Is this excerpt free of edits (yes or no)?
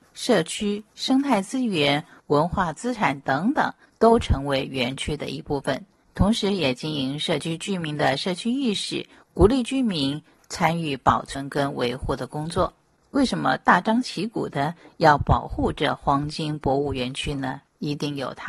yes